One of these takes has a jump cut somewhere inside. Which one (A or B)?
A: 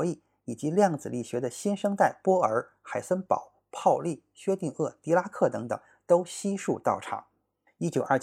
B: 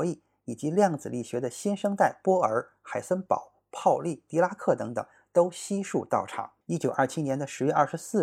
B